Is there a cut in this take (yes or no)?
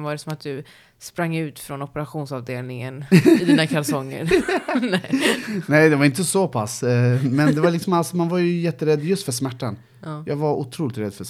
no